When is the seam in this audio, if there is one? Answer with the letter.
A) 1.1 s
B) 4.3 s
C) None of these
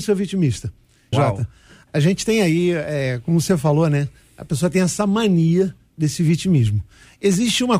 A